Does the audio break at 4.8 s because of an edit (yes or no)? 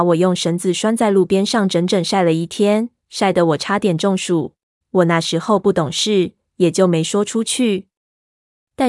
yes